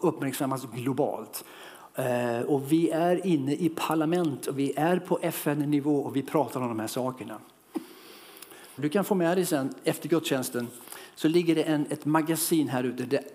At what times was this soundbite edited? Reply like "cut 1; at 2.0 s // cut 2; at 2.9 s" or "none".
cut 1; at 8.8 s